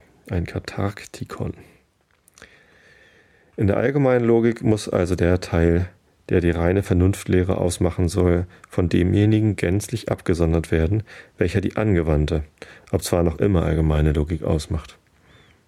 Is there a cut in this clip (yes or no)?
no